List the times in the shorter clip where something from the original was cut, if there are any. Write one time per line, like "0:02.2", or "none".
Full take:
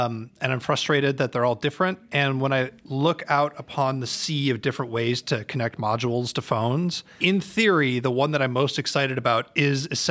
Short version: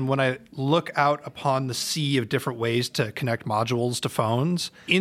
none